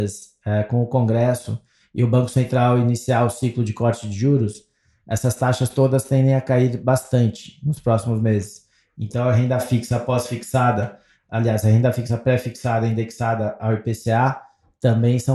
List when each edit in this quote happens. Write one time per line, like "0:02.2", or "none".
none